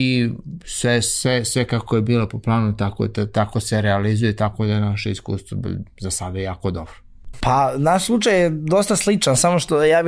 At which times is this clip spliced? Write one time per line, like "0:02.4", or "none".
0:07.3